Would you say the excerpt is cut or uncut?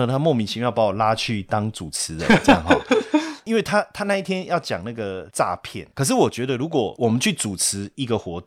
uncut